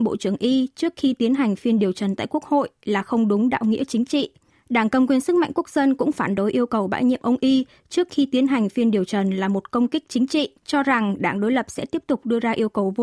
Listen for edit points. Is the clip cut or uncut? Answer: cut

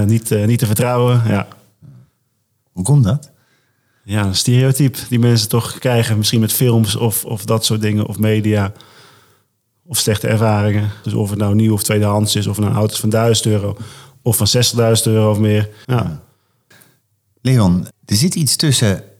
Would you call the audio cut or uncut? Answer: cut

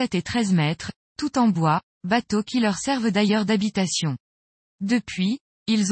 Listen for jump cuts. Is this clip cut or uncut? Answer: uncut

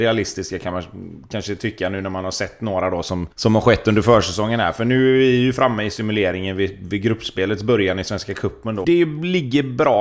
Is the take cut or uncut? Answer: cut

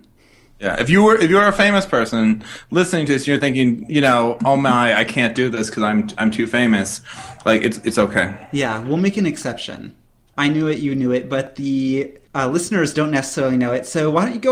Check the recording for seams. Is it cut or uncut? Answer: cut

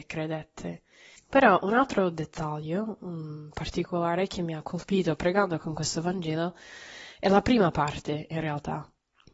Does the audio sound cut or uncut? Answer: cut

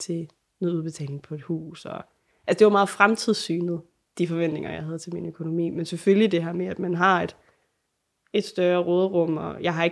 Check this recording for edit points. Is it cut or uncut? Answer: uncut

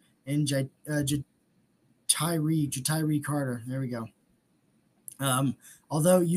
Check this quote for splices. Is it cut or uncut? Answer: uncut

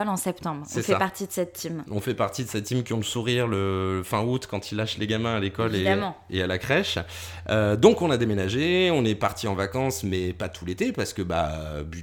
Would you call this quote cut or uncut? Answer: uncut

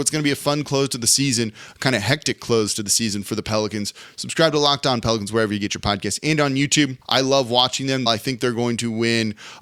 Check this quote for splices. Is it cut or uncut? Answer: cut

